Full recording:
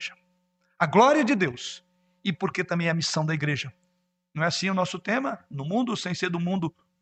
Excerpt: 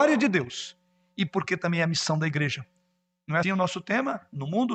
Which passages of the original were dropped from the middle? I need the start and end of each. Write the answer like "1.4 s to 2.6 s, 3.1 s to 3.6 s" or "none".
4.5 s to 4.6 s